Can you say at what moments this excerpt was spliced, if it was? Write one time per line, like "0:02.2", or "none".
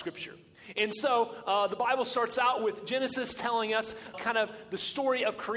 0:04.1